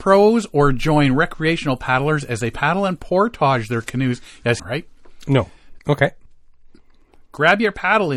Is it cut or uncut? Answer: cut